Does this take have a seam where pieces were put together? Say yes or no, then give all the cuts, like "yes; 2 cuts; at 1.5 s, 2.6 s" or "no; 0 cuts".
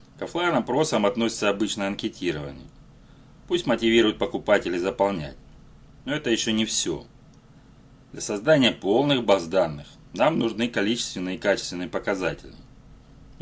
yes; 2 cuts; at 3.4 s, 6.0 s